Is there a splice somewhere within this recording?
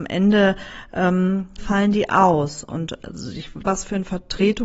yes; 2 cuts; at 1.6 s, 3.6 s

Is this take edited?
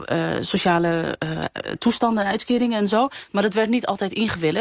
no; 0 cuts

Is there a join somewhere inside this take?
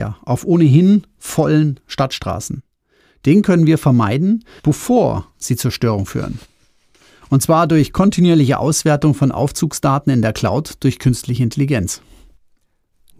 yes; 1 cut; at 4.6 s

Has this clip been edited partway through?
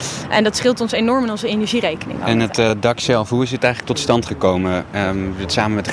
no; 0 cuts

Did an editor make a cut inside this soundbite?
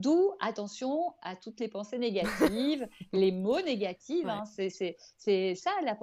no; 0 cuts

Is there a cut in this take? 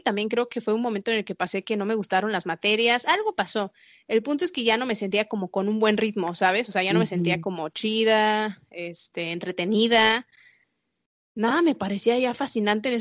no; 0 cuts

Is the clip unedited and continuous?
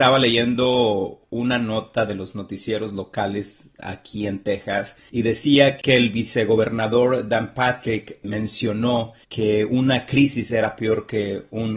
no; 1 cut; at 8.2 s

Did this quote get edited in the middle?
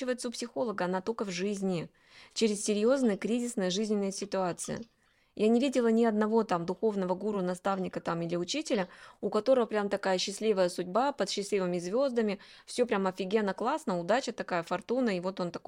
no; 0 cuts

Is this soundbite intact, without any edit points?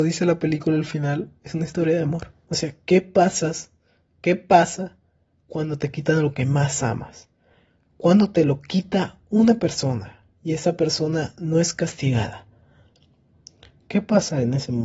no; 1 cut; at 2.5 s

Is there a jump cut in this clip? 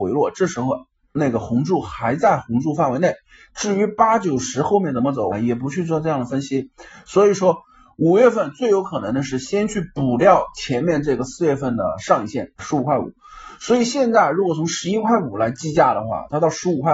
yes; 2 cuts; at 5.3 s, 12.6 s

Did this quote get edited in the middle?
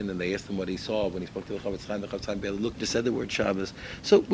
yes; 1 cut; at 2.7 s

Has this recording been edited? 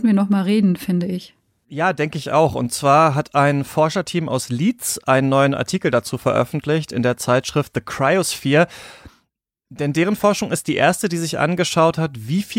no; 0 cuts

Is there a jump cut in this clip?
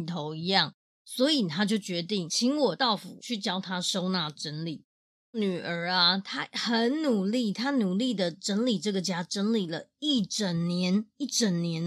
yes; 2 cuts; at 1.0 s, 5.2 s

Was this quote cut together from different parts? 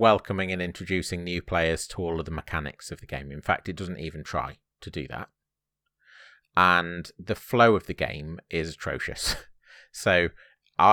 no; 0 cuts

